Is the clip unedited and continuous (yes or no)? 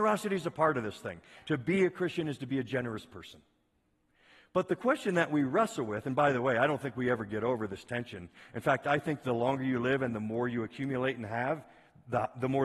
yes